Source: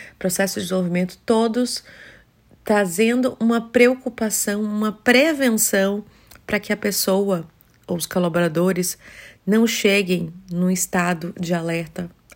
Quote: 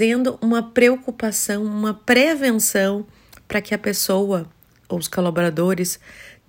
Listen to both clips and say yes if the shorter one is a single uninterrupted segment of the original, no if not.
yes